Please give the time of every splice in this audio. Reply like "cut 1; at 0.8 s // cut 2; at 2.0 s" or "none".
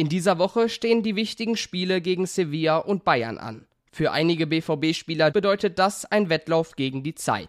cut 1; at 5.3 s